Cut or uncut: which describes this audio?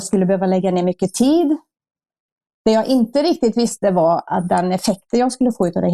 uncut